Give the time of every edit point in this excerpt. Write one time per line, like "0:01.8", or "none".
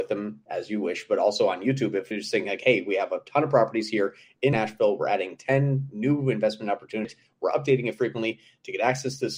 none